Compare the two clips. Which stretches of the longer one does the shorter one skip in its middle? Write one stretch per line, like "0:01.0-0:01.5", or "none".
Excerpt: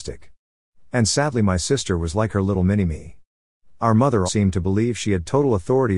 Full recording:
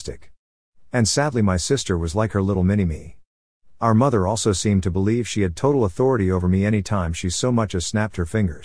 0:04.3-0:04.6